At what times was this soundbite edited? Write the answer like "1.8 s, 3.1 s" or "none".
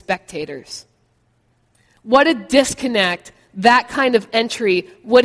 none